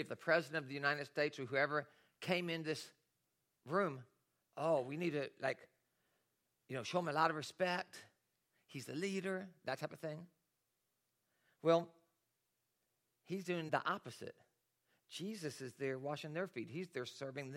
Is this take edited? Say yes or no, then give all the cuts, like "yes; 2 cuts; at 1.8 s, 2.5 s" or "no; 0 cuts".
yes; 2 cuts; at 4.4 s, 13.7 s